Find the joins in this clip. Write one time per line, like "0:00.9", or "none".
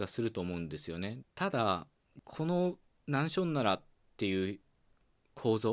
0:01.2